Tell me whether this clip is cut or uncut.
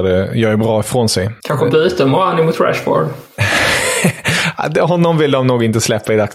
cut